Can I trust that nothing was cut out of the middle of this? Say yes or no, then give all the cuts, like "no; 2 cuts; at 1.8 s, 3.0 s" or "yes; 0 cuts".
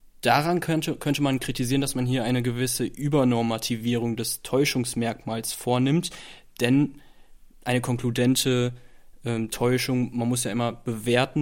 yes; 0 cuts